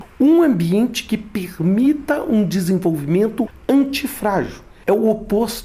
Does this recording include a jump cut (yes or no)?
no